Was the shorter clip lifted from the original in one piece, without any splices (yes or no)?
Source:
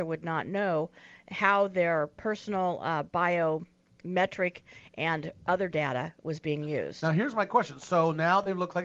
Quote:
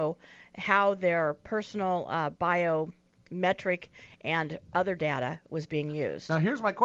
yes